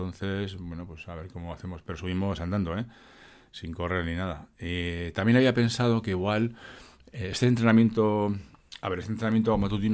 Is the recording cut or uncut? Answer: uncut